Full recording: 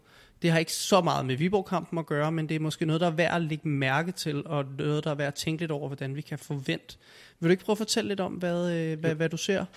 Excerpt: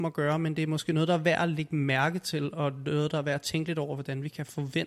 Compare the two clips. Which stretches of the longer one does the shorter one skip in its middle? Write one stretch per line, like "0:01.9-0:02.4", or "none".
none